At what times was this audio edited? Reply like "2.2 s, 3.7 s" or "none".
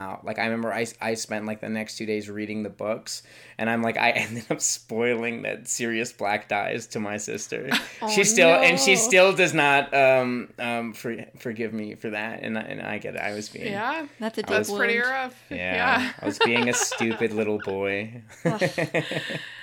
none